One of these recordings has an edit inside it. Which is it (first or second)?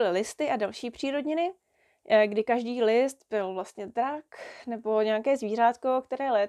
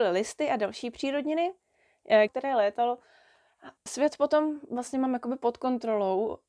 second